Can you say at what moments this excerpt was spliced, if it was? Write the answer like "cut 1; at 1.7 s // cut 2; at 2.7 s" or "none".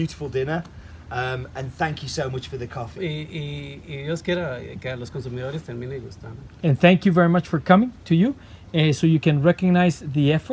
cut 1; at 2.9 s